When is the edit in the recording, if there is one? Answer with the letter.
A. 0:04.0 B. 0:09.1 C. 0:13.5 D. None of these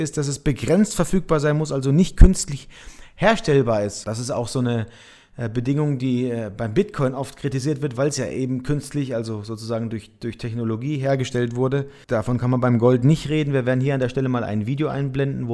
D